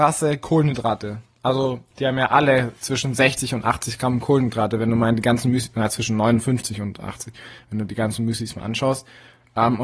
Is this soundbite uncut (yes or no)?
no